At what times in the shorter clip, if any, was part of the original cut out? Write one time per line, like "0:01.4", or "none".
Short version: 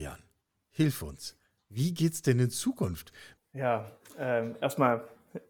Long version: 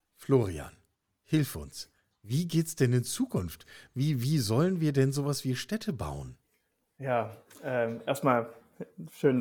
0:03.4